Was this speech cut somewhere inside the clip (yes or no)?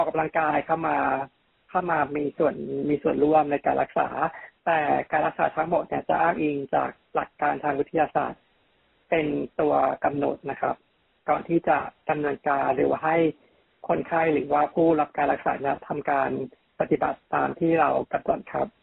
no